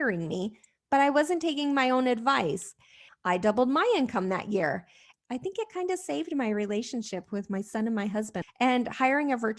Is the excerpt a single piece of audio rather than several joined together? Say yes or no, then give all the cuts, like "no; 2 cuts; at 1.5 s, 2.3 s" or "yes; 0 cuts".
no; 3 cuts; at 3.1 s, 5.1 s, 8.4 s